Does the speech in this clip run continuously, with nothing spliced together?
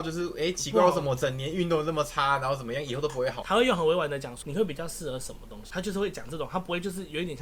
no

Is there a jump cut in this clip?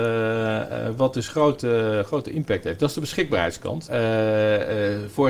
yes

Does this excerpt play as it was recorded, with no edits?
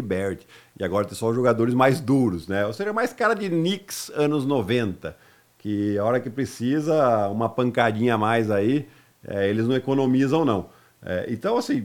yes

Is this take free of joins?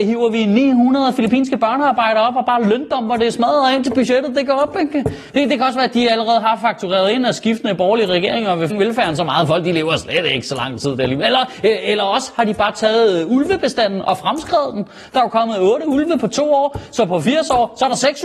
no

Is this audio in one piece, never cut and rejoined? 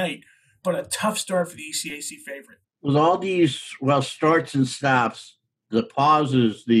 yes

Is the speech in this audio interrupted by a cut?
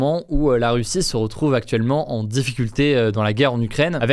no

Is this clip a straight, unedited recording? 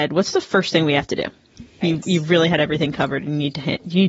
no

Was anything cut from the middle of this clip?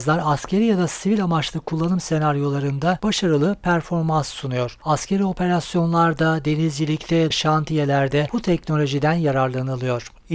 yes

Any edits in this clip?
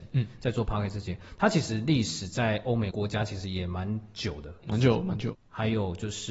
yes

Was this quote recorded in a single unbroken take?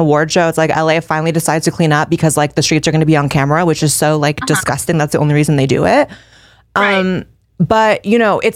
yes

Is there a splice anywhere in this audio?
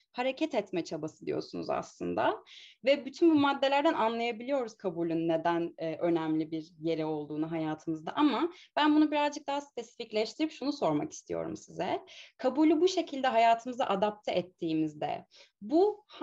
no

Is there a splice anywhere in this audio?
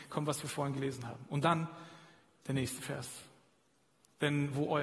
no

